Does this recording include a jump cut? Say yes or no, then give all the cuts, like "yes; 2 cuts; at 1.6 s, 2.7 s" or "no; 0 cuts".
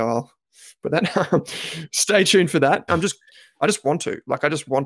yes; 1 cut; at 2.9 s